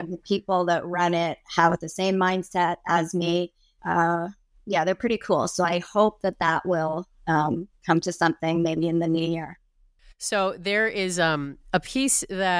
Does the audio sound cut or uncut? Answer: cut